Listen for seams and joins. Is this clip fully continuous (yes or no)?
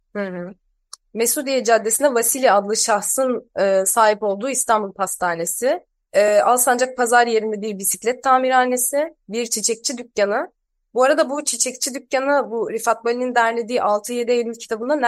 yes